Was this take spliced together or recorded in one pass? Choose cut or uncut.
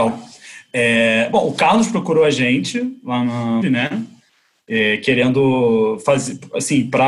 cut